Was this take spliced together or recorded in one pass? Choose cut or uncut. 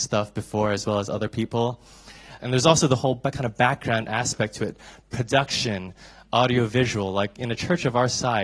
cut